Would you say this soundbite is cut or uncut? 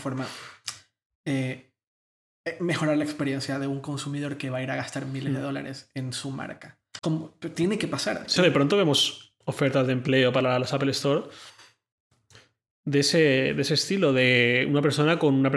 cut